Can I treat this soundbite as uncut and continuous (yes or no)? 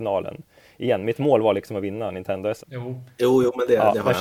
no